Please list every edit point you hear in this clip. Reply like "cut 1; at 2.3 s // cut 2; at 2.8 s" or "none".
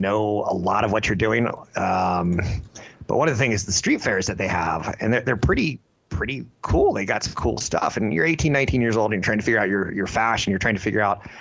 none